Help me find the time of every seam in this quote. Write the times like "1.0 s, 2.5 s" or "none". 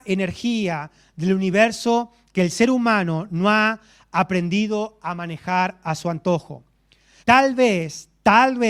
7.2 s